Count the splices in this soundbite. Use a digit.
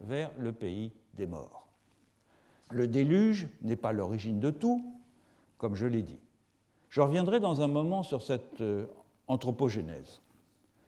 2